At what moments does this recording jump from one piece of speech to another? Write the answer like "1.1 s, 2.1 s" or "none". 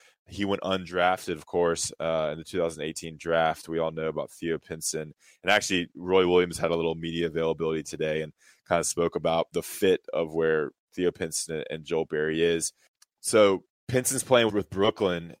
14.5 s